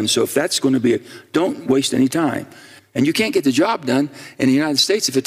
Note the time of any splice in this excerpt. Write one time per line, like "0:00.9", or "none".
0:02.8